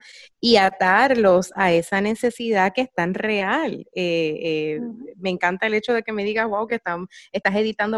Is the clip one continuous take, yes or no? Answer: yes